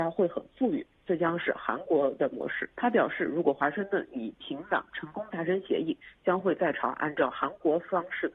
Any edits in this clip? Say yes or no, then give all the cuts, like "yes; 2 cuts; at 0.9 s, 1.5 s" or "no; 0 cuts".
yes; 1 cut; at 2.7 s